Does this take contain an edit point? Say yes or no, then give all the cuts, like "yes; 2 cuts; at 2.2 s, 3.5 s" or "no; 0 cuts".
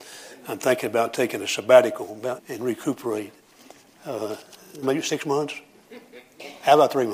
yes; 2 cuts; at 2.4 s, 4.8 s